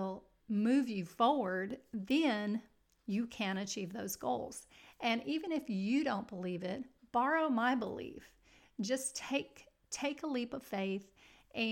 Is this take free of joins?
yes; 0 cuts

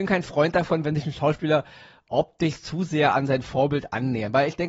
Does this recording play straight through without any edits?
yes; 0 cuts

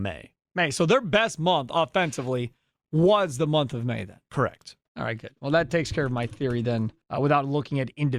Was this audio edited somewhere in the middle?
yes; 1 cut; at 7.0 s

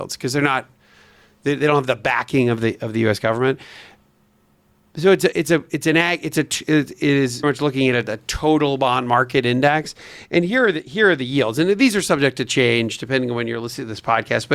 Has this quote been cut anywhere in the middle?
yes; 1 cut; at 7.4 s

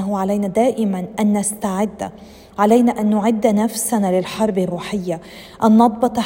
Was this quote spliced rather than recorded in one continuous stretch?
no; 0 cuts

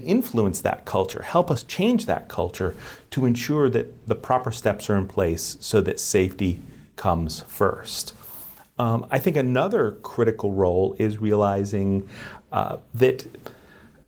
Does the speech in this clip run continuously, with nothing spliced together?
yes; 0 cuts

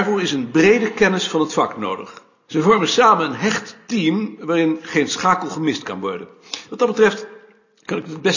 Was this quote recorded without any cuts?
no; 1 cut; at 2.5 s

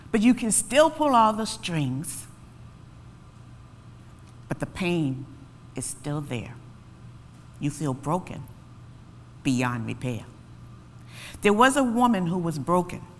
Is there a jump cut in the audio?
no; 0 cuts

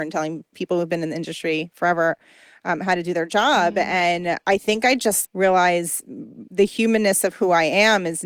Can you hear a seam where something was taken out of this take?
yes; 1 cut; at 5.3 s

